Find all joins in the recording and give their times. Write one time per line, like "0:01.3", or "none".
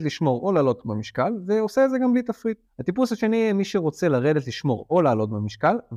0:02.7